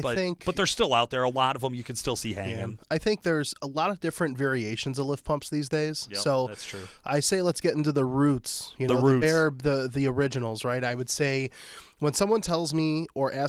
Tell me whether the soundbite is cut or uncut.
uncut